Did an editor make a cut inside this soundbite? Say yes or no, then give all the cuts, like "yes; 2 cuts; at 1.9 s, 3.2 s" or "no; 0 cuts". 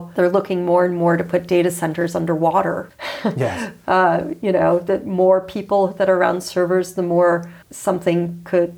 yes; 1 cut; at 2.9 s